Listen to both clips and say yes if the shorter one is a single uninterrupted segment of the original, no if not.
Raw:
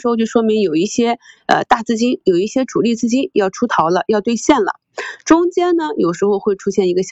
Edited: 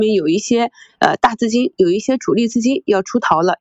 yes